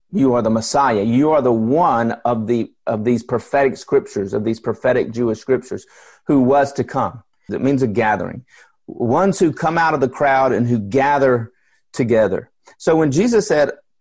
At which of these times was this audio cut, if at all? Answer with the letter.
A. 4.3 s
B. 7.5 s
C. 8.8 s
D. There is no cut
B